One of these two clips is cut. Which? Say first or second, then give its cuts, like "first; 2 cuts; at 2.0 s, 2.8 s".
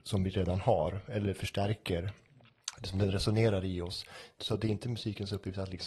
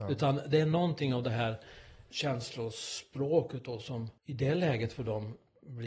second; 2 cuts; at 2.1 s, 4.2 s